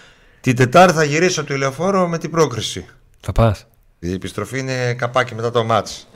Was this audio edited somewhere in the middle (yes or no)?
yes